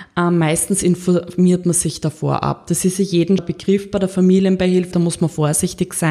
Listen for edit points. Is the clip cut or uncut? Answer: cut